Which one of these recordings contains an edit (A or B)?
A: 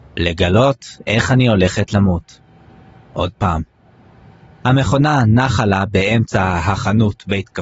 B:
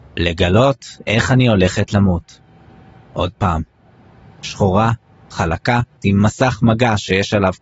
B